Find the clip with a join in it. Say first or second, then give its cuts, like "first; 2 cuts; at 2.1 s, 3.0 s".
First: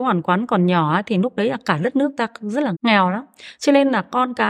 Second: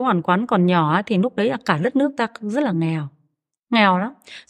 first; 1 cut; at 2.7 s